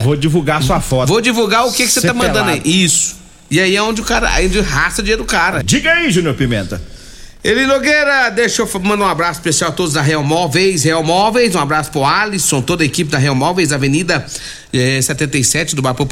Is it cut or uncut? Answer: cut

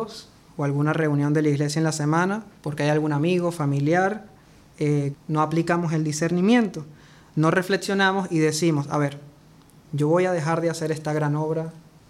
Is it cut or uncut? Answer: cut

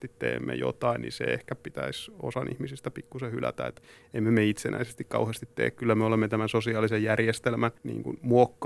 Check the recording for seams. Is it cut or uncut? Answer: cut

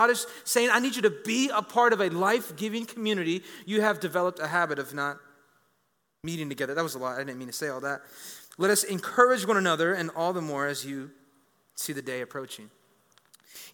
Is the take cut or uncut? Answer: uncut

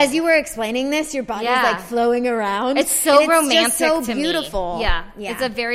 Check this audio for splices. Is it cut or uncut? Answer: uncut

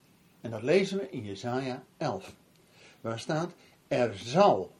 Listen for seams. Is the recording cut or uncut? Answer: uncut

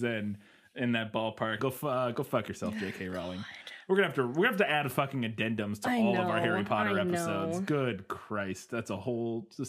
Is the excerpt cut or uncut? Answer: cut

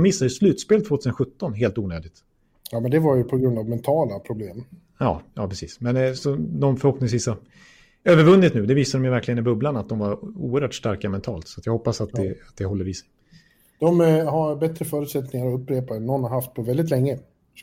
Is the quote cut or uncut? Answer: uncut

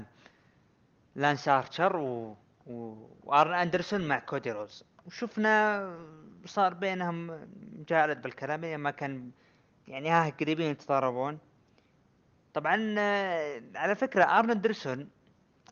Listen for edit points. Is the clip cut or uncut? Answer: uncut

